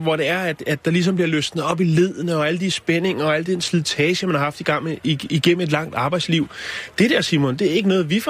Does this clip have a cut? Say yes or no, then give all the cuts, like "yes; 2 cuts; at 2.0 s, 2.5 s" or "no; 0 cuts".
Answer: no; 0 cuts